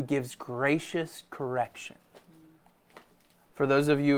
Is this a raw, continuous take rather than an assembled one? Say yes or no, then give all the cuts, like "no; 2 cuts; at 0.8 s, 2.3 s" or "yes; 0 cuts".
yes; 0 cuts